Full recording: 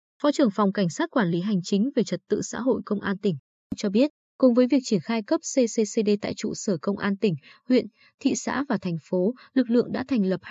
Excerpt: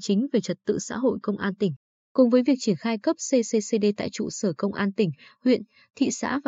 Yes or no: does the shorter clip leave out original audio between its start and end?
yes